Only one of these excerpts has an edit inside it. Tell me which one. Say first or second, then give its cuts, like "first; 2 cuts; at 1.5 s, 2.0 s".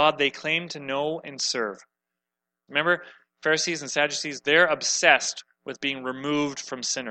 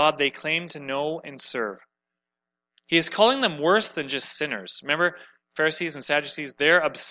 first; 1 cut; at 2.7 s